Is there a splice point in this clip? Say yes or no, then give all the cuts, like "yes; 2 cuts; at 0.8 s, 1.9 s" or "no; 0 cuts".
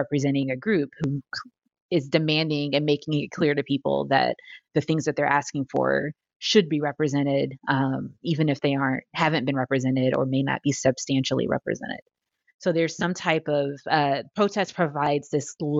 no; 0 cuts